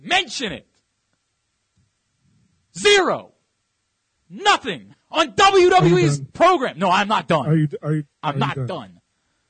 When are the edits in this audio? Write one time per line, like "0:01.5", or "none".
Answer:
0:05.0